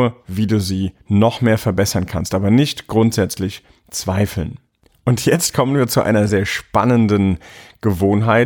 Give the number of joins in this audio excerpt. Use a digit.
1